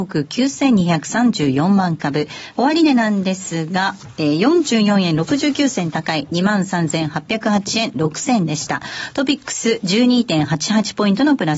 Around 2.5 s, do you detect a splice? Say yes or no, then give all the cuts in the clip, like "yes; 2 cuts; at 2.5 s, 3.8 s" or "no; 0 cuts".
yes; 1 cut; at 2.5 s